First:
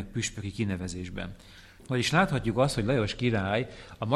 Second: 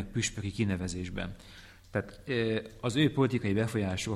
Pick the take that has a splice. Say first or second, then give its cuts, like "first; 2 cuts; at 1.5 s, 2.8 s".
first; 1 cut; at 1.8 s